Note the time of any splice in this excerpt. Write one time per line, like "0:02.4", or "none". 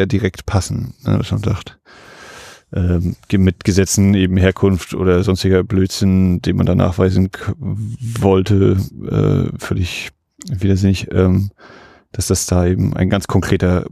none